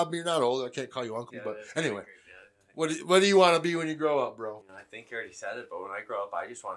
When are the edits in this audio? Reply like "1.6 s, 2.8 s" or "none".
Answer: 1.3 s